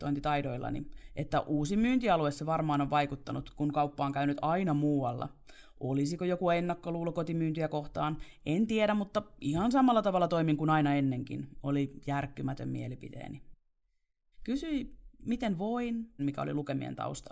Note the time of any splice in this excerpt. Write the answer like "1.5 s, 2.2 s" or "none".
14.3 s, 16.2 s